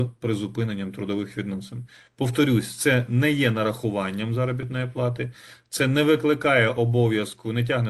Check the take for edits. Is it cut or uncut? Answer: uncut